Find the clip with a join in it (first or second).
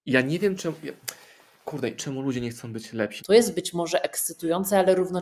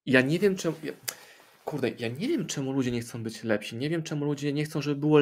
first